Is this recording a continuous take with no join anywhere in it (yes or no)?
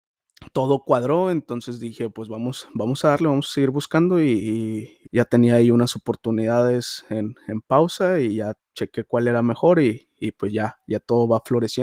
no